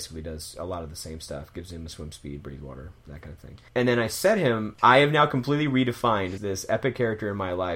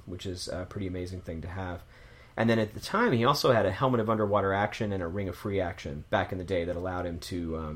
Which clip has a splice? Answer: first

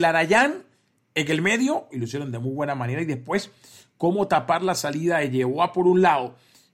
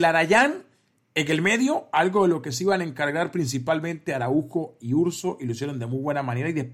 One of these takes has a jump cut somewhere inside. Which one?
first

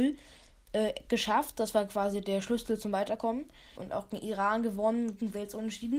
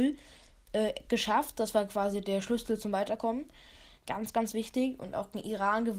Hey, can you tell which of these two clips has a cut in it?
first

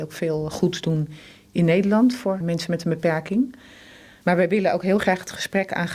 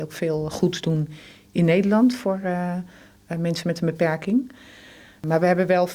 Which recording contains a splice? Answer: first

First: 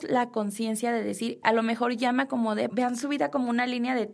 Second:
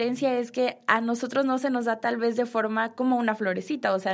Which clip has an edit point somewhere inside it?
first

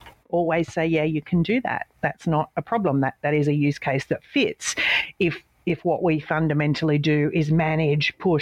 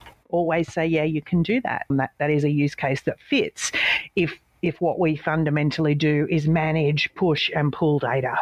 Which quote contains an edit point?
second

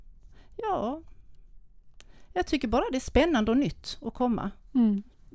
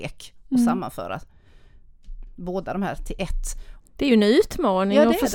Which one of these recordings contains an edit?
second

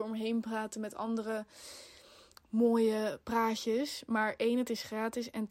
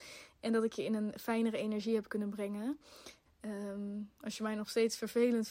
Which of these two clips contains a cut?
second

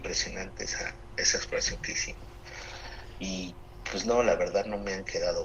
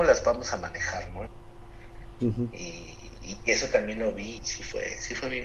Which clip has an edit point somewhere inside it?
second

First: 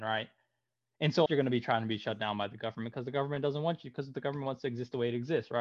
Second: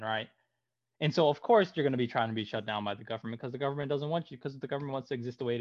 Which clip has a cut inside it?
first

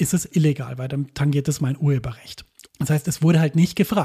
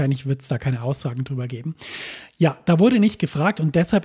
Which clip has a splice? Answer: first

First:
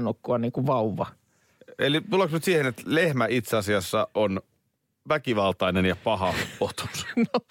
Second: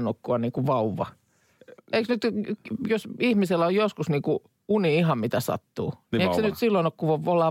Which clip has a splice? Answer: second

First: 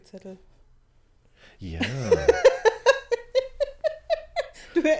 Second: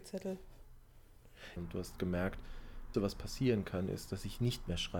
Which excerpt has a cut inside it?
second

